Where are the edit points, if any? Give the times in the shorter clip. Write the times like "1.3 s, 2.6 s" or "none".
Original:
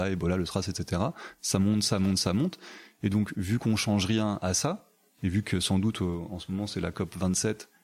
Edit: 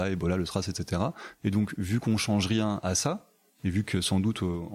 1.4 s

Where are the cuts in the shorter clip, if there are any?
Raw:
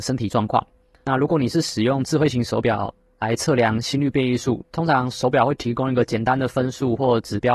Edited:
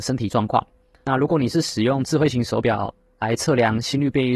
none

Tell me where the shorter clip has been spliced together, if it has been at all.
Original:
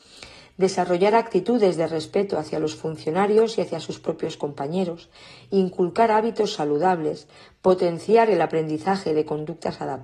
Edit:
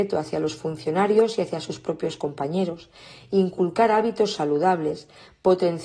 none

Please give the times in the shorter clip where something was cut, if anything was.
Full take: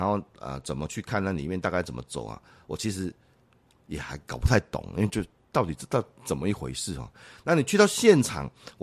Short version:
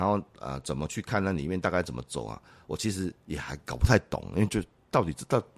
3.2 s

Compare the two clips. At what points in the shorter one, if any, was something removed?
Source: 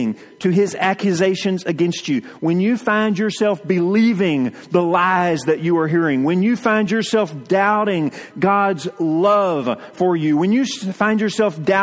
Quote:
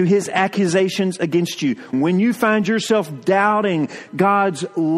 1.9 s

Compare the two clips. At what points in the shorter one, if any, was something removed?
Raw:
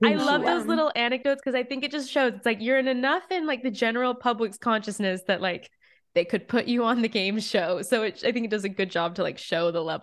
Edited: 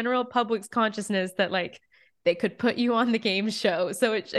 none

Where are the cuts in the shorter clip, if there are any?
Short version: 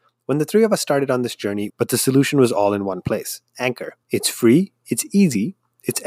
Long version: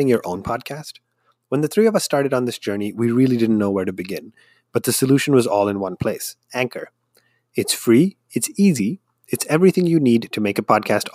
1.7 s, 4.0 s

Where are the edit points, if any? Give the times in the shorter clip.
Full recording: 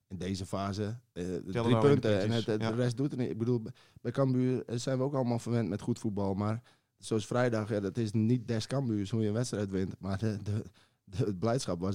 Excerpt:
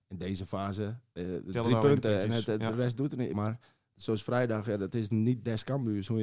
3.3 s

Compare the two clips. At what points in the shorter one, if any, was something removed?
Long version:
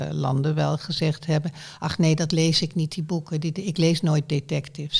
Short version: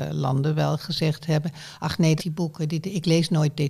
2.2 s

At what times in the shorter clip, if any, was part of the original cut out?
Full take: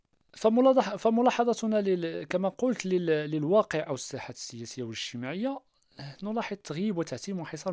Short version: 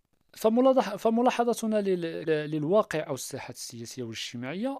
2.3 s

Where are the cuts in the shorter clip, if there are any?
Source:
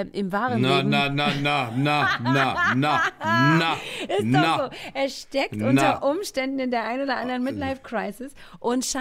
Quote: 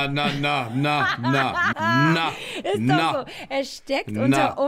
1.7 s

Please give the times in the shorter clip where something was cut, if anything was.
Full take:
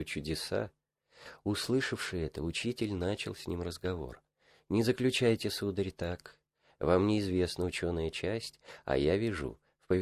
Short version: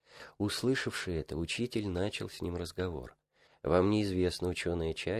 3.5 s

